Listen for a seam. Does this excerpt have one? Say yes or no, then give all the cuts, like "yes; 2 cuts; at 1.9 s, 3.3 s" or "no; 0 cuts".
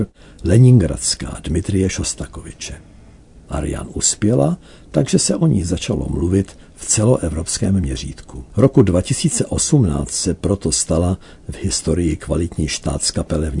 yes; 1 cut; at 8.5 s